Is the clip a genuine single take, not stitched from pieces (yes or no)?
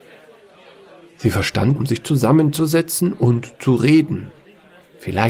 no